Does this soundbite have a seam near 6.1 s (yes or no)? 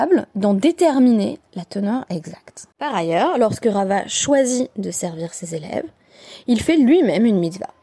no